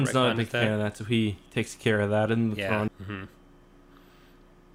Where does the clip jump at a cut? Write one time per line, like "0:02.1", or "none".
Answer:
0:02.9